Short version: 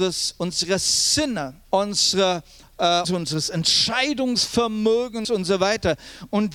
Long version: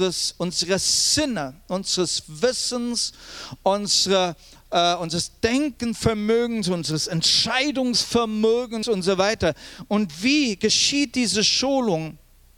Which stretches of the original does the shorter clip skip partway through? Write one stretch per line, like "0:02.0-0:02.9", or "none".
0:01.6-0:03.6
0:05.0-0:06.6

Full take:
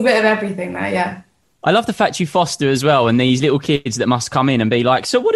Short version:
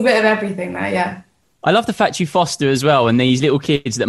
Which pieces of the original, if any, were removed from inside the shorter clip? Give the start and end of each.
none

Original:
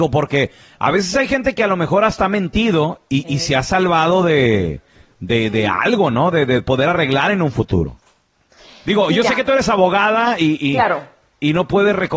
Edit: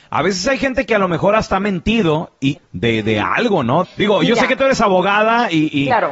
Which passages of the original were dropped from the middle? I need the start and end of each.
0:03.3-0:05.0
0:06.3-0:08.7

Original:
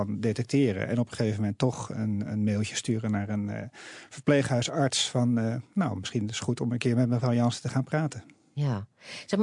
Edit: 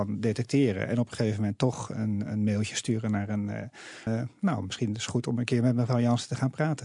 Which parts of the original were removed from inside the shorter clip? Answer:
0:04.1-0:05.4

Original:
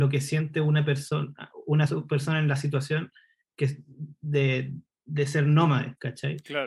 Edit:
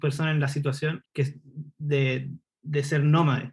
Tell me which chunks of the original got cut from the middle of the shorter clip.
0:03.1-0:03.5

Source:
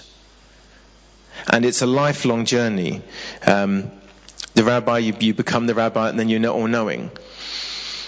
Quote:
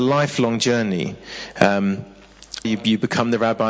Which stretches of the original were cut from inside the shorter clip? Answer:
0:04.5-0:05.0

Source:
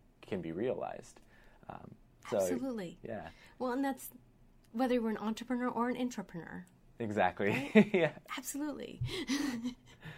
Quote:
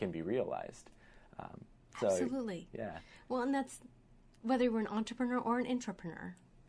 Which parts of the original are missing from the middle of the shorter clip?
none

